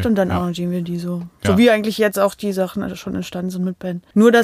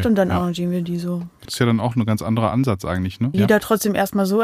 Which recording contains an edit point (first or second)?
second